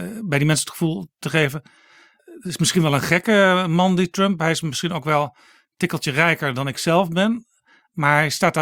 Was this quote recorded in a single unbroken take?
yes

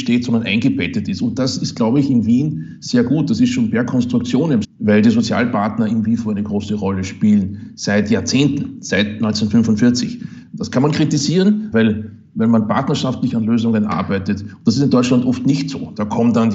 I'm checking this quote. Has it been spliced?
yes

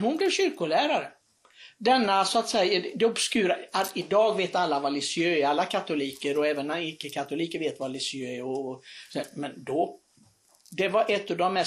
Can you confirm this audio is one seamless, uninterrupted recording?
yes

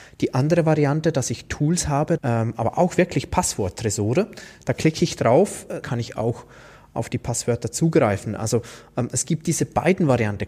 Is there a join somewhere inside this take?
yes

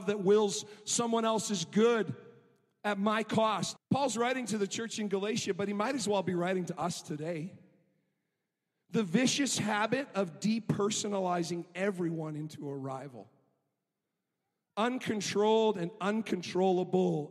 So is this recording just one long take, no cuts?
no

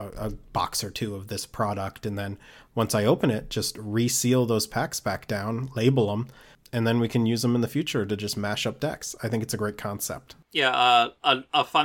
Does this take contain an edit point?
no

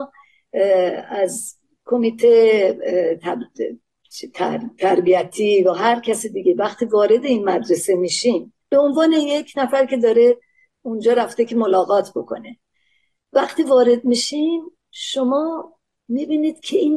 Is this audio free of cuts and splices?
no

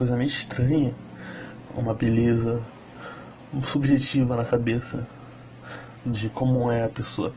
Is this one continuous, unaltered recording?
no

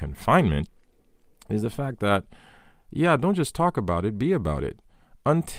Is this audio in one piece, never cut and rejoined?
yes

